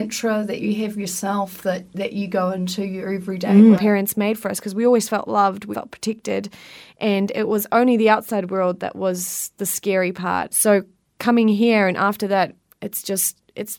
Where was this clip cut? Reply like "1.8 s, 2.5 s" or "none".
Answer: 3.7 s, 5.7 s, 10.5 s

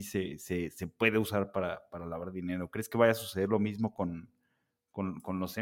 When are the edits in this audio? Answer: none

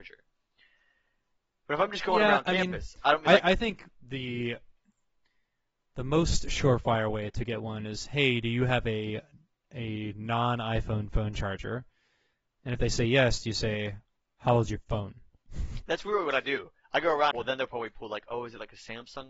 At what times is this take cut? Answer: 17.3 s

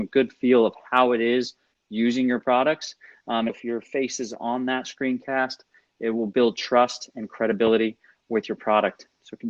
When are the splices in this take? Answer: 3.5 s

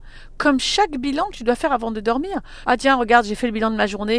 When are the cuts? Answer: 2.6 s

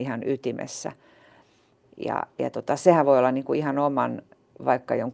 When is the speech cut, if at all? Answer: 1.8 s

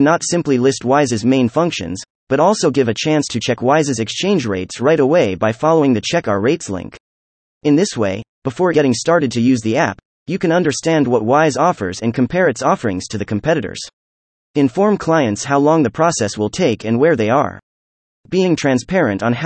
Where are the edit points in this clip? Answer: 8.7 s

